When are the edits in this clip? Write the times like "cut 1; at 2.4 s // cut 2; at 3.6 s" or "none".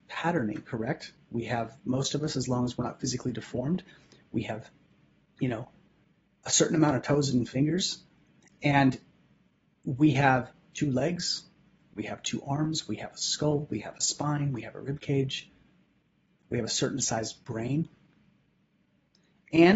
none